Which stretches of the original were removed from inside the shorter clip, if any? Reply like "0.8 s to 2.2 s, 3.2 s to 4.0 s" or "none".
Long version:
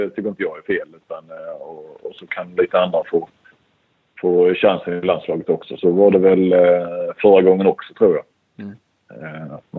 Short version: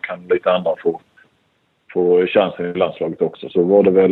none